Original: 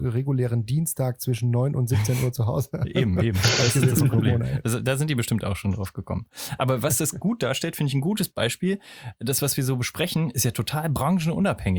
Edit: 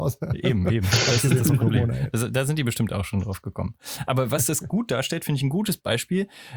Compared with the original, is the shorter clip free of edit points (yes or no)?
yes